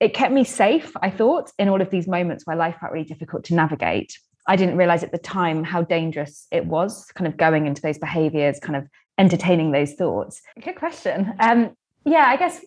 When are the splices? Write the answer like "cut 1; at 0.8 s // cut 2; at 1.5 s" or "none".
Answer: cut 1; at 10.5 s